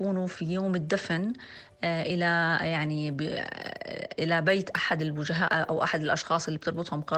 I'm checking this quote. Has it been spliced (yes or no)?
yes